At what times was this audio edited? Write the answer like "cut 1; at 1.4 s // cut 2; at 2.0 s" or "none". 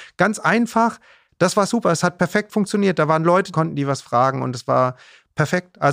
cut 1; at 3.5 s